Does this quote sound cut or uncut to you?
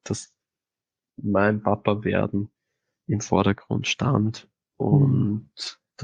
uncut